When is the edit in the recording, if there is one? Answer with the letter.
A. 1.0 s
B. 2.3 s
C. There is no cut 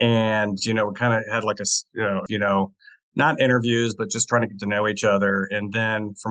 B